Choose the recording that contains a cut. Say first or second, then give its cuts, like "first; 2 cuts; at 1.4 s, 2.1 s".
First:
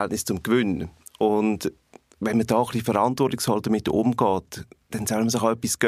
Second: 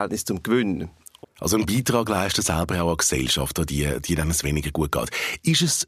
second; 1 cut; at 1.2 s